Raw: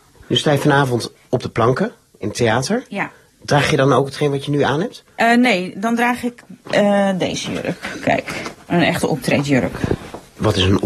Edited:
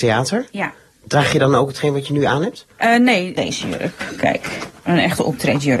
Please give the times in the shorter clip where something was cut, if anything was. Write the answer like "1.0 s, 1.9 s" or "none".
3.4 s